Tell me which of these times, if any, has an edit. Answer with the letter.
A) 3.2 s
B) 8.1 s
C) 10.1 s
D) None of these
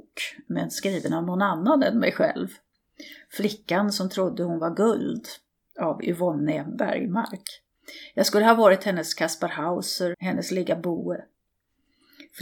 C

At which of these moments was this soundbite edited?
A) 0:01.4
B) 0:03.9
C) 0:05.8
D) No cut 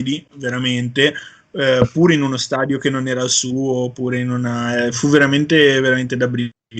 D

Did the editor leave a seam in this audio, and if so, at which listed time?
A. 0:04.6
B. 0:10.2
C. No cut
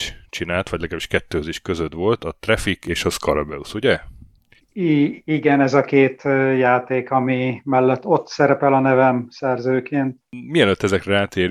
A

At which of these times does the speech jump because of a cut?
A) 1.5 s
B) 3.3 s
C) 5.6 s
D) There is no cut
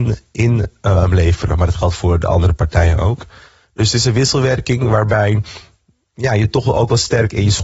D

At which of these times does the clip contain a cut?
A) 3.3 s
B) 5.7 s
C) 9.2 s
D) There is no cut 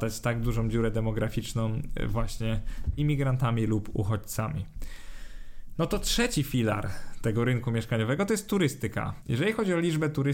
C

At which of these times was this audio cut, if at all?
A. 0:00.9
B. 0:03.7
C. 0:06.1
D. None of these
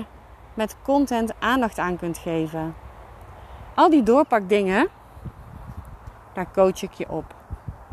B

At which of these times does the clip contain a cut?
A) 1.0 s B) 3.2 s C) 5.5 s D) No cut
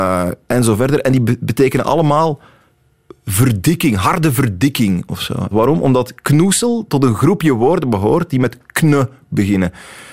C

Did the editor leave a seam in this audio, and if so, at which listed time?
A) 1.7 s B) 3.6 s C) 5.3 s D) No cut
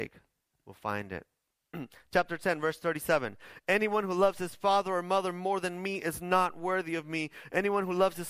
A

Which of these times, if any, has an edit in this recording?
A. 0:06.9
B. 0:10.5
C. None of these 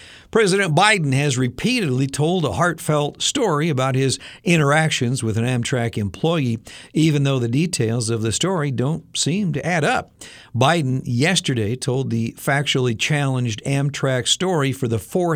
C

